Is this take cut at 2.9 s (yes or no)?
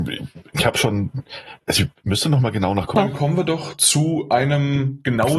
yes